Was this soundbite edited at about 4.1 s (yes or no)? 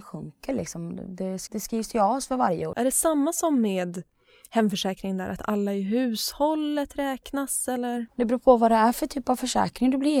no